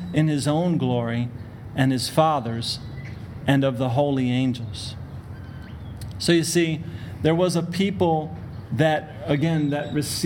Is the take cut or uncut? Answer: uncut